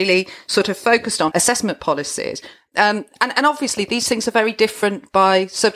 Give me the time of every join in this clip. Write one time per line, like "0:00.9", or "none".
0:01.3